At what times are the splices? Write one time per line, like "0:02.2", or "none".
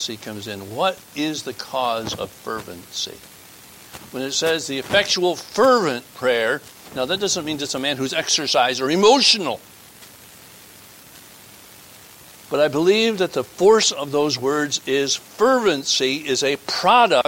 none